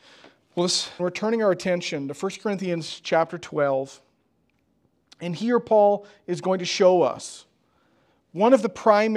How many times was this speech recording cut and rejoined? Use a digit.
1